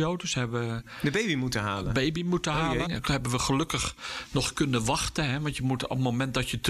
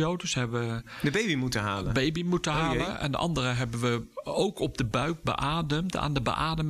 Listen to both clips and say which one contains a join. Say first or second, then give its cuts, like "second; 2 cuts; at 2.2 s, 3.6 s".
first; 1 cut; at 2.9 s